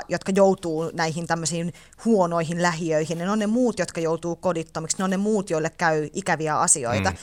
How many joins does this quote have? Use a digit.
0